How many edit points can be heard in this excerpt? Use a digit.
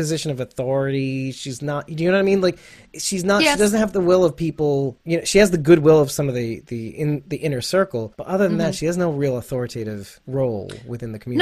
0